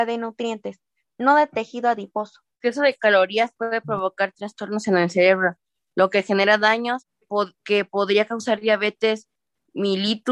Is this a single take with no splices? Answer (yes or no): no